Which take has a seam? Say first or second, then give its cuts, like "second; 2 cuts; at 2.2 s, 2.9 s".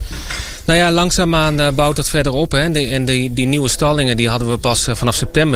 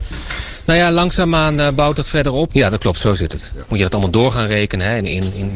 second; 2 cuts; at 2.5 s, 3.7 s